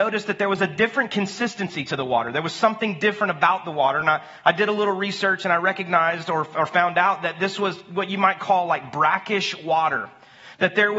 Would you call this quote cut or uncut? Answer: uncut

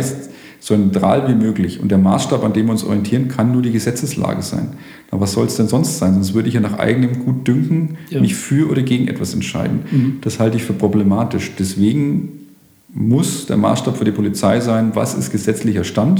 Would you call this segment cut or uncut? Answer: uncut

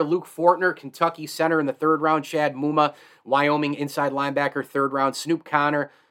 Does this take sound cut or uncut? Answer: uncut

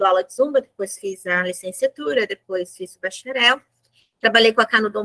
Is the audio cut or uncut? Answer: uncut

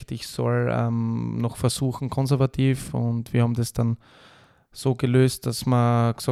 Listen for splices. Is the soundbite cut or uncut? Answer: uncut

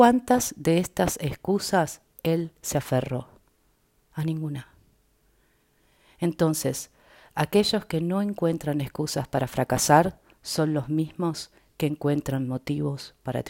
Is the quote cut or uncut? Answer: uncut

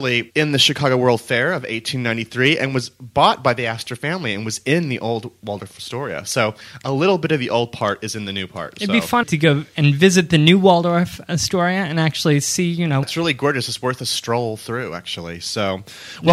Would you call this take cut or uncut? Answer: cut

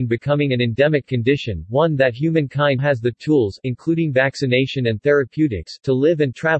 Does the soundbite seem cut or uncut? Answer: cut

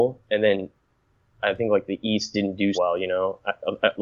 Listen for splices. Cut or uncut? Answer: cut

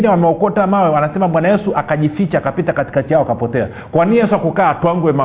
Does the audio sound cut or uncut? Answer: uncut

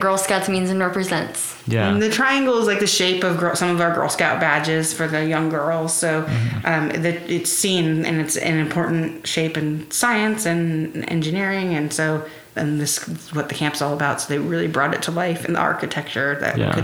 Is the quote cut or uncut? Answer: cut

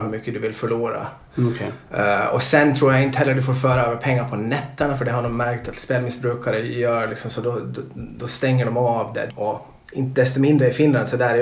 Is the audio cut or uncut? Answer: cut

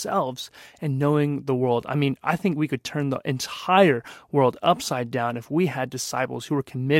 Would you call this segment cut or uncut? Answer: uncut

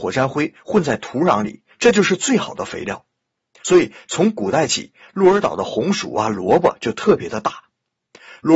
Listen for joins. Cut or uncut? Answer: uncut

